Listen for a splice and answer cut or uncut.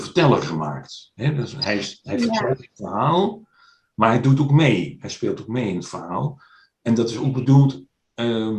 uncut